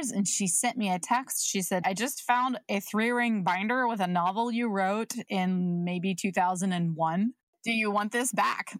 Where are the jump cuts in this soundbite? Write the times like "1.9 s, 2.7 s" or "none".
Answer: 1.8 s